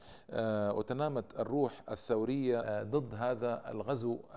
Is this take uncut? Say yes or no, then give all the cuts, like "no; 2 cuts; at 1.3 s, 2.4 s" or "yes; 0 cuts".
no; 1 cut; at 2.6 s